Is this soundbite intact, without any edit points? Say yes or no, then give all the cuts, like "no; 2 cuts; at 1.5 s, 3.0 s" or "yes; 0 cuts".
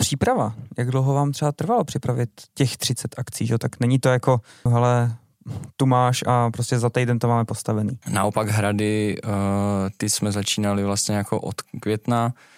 no; 2 cuts; at 4.7 s, 8.0 s